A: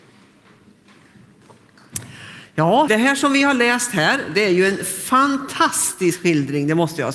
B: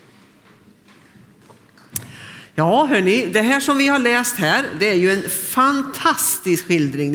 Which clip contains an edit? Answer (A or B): A